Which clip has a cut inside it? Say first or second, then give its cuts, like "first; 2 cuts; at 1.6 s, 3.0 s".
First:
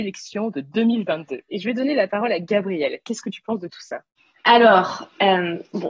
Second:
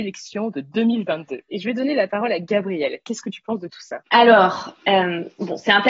second; 1 cut; at 4.1 s